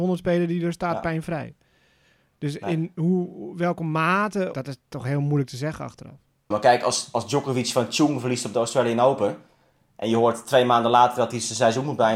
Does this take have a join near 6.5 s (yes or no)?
yes